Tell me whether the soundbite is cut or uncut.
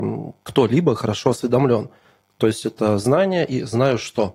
uncut